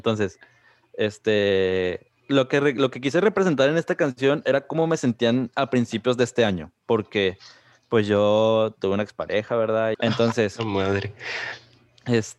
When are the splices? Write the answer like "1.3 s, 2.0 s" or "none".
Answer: 9.9 s

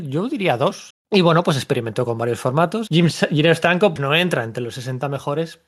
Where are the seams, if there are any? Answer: 0.9 s, 2.9 s, 4.0 s

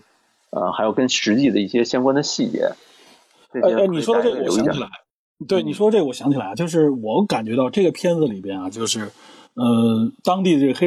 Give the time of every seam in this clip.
none

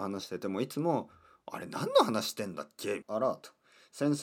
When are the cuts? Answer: 3.0 s

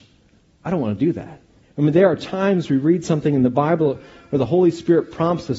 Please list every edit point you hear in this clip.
1.6 s

